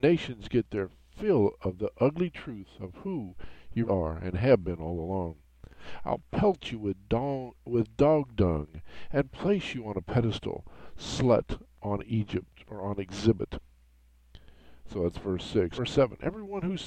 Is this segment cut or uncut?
cut